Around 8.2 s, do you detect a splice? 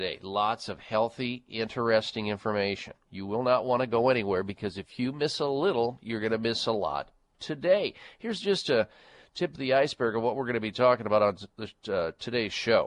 no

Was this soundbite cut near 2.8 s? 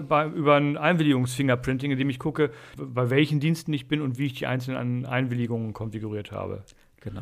yes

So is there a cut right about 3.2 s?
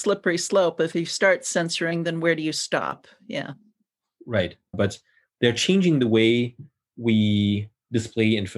no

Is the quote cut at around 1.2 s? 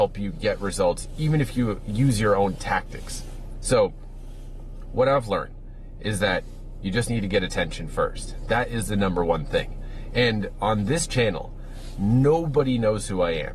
no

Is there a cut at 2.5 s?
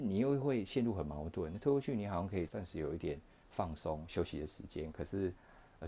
yes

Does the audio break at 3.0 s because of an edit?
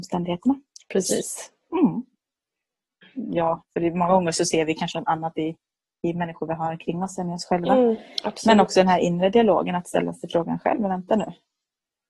yes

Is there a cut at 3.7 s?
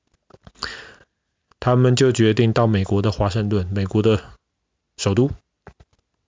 no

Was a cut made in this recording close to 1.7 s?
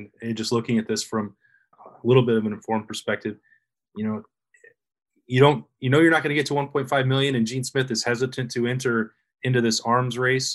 yes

